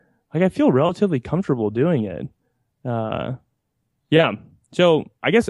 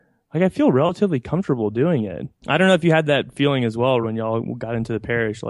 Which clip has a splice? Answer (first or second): second